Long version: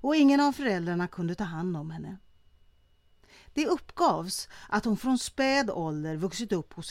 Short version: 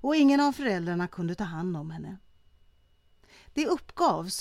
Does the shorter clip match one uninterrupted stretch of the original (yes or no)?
yes